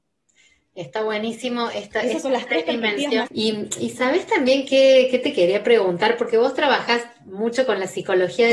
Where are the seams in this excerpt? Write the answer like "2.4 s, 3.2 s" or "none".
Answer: 3.3 s